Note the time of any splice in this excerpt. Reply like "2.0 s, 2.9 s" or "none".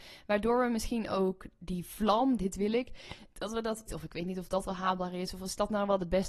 2.4 s, 3.9 s